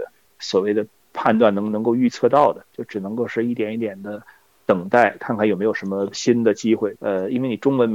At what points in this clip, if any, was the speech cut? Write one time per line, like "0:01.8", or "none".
0:07.0